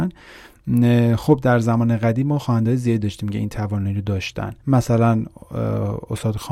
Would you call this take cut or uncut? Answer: cut